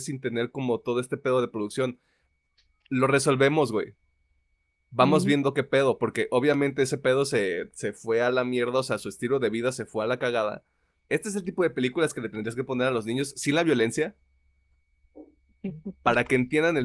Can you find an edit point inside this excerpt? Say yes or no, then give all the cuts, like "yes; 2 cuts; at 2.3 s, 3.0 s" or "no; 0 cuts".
yes; 1 cut; at 11.1 s